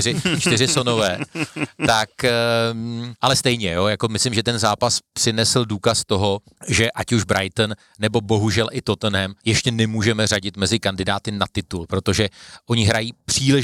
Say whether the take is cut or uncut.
uncut